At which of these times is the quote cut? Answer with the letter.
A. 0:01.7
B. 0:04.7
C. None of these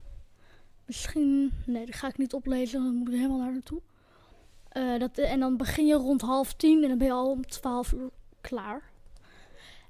C